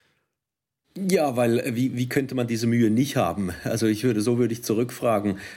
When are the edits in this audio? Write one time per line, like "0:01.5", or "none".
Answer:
none